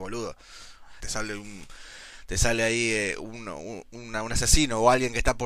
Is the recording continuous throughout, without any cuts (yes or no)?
no